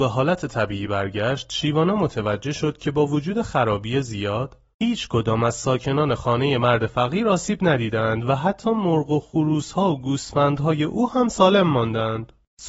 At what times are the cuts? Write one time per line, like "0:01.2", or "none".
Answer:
none